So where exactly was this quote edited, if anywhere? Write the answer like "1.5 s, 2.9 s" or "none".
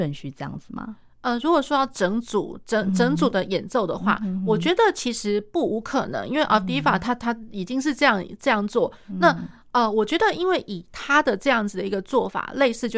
none